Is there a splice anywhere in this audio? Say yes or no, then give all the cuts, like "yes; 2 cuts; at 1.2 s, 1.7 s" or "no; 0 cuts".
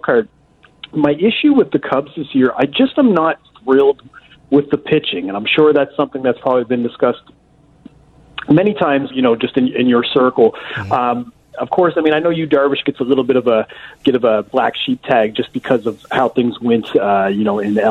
yes; 1 cut; at 9.1 s